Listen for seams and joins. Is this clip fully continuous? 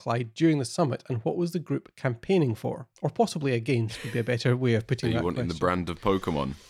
no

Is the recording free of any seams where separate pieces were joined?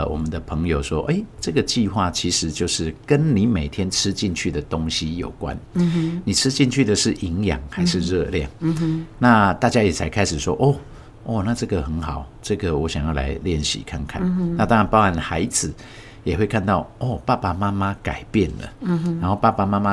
yes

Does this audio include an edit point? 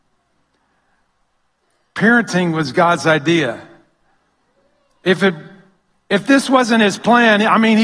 no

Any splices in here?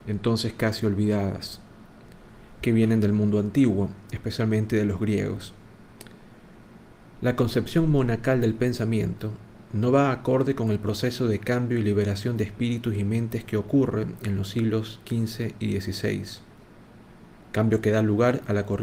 yes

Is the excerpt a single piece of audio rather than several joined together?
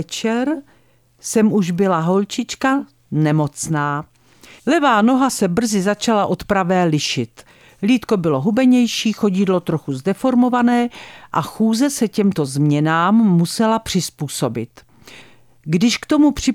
no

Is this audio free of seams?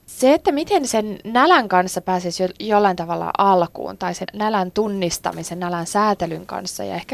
no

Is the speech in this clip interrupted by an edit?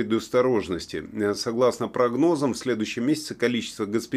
no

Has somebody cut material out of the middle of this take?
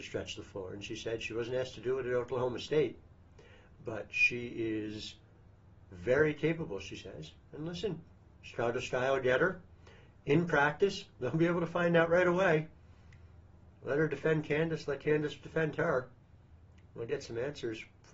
no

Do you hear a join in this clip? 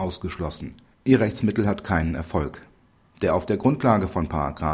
yes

